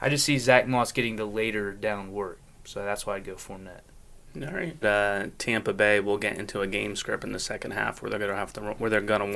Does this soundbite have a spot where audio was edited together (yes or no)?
yes